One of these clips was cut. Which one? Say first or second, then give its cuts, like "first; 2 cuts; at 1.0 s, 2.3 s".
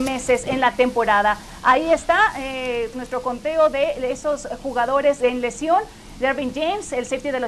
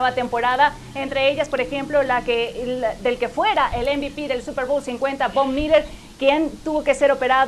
first; 1 cut; at 2.9 s